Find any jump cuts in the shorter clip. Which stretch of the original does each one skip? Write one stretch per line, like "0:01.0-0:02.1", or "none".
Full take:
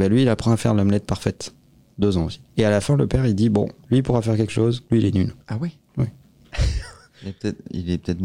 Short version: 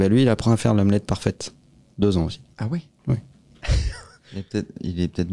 0:02.5-0:05.4